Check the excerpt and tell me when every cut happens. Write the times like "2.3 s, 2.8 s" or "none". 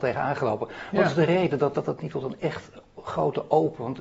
1.7 s